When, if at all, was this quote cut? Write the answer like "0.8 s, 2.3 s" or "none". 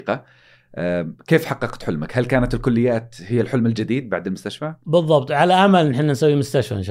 none